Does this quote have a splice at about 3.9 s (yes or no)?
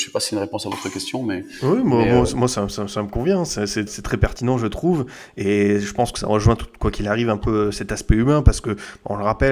yes